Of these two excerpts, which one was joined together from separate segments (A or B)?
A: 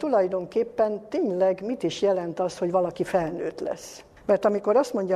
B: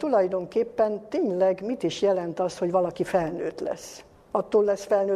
A